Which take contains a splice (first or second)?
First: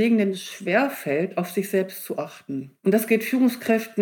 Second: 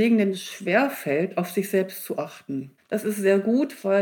second